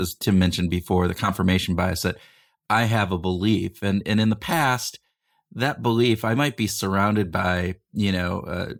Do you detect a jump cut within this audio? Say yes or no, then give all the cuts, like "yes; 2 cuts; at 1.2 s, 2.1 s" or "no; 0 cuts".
no; 0 cuts